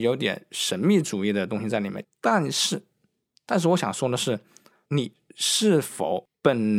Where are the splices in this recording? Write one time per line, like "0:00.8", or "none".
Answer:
0:02.0
0:04.8